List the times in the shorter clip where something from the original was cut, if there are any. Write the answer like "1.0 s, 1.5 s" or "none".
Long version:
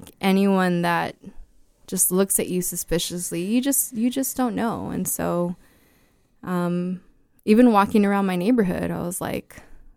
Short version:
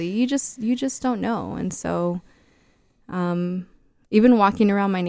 none